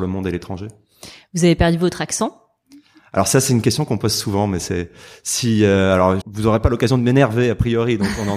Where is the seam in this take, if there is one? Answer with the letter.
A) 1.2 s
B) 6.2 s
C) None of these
B